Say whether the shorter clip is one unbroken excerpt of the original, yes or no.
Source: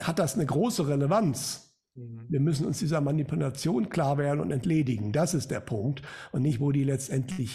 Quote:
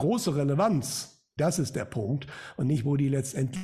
no